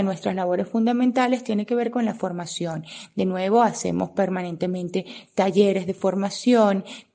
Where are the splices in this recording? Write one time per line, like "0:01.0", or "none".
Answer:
none